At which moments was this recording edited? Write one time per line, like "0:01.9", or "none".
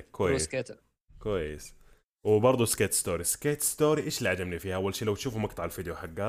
none